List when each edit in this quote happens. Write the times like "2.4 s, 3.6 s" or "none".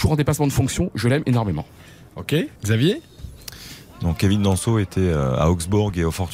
2.6 s

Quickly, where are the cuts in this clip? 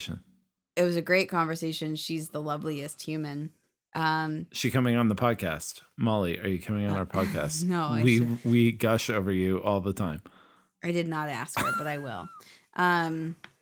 none

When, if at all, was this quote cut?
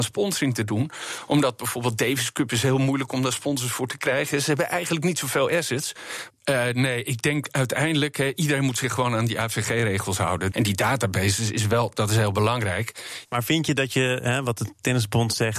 6.3 s, 10.5 s, 13.2 s

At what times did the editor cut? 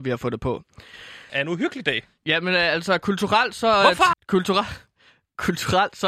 1.3 s, 4.1 s

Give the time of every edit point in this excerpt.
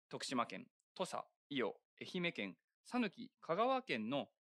1.4 s

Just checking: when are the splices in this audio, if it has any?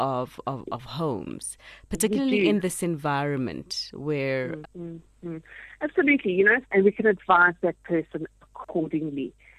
4.6 s, 6.6 s

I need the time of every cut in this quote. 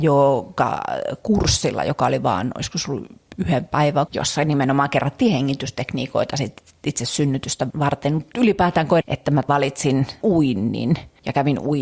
4.1 s, 9.0 s

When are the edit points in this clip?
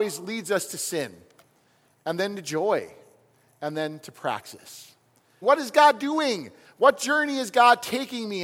5.4 s

